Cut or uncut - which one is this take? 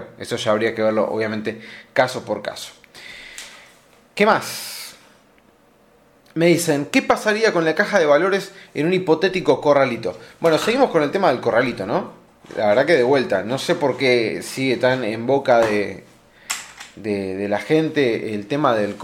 uncut